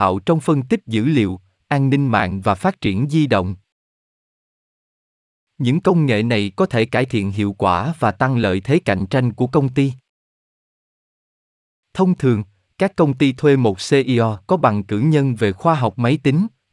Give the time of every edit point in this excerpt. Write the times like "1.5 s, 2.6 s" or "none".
none